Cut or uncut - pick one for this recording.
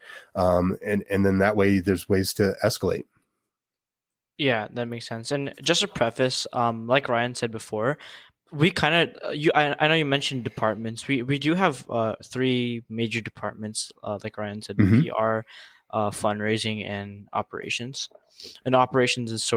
uncut